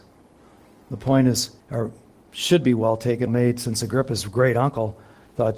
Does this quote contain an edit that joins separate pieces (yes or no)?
yes